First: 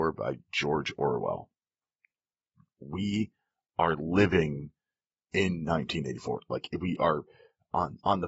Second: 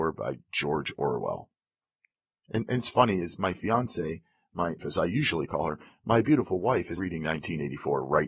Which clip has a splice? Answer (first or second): second